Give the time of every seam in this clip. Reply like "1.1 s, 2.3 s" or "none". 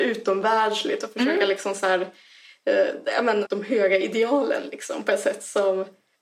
3.4 s